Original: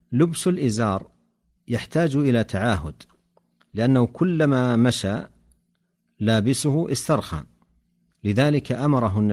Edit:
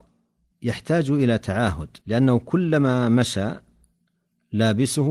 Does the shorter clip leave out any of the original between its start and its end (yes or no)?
yes